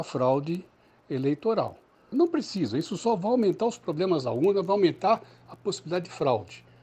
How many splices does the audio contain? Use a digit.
1